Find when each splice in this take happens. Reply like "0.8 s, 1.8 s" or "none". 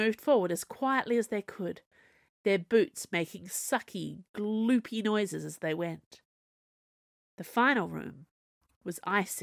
none